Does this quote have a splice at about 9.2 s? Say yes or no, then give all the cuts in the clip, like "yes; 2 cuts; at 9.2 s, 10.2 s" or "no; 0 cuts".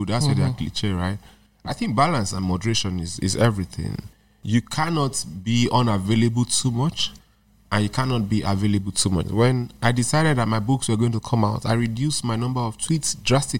yes; 1 cut; at 9.2 s